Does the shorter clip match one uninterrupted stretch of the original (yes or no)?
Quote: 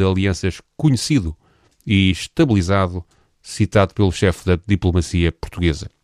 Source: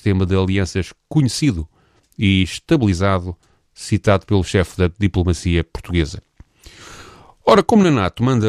yes